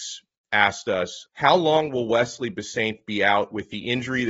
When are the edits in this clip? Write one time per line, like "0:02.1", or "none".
0:01.3